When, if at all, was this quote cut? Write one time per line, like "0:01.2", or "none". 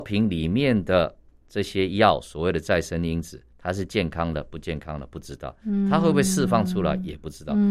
0:03.5